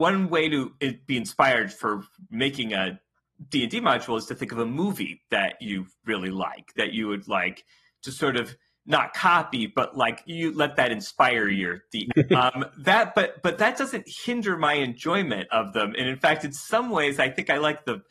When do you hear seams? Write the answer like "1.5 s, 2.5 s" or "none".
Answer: 12.1 s